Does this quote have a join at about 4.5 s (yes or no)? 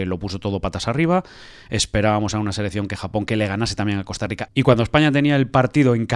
yes